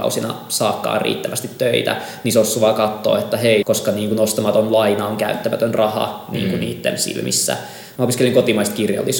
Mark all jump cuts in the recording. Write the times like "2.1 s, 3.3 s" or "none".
3.6 s, 8.0 s